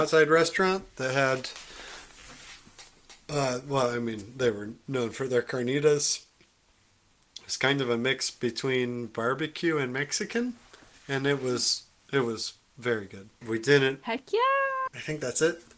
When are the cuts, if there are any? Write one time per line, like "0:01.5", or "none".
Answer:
0:13.4
0:14.9